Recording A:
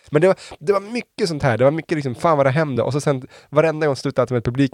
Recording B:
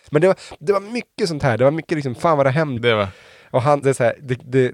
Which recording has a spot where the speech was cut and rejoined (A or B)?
B